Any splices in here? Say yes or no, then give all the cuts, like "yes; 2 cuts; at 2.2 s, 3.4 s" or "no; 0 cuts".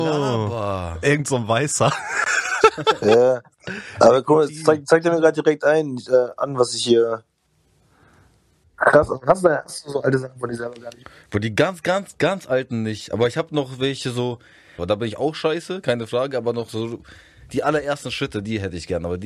yes; 2 cuts; at 8.6 s, 14.8 s